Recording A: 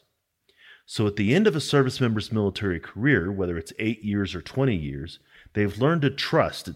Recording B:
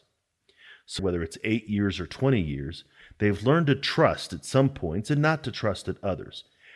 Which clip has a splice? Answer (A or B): B